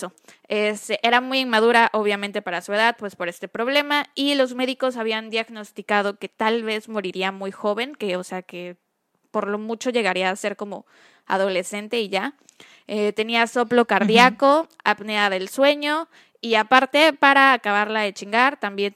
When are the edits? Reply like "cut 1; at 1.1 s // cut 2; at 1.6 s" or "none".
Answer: none